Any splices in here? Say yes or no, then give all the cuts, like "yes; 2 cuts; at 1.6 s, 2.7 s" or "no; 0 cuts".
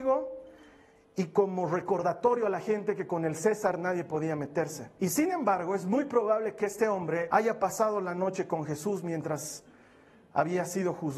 yes; 2 cuts; at 5.0 s, 7.3 s